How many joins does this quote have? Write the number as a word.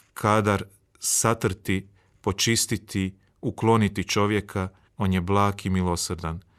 one